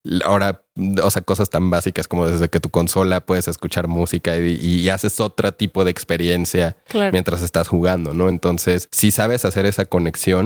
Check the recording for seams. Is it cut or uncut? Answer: cut